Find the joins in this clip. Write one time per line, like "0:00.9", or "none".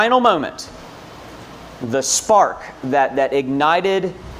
none